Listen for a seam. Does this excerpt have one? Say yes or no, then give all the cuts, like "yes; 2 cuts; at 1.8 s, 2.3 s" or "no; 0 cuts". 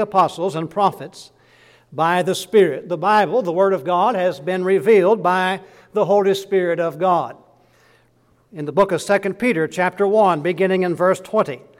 no; 0 cuts